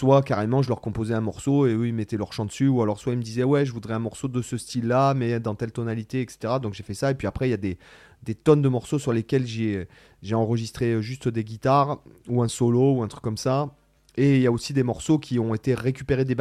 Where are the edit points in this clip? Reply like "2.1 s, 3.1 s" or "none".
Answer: none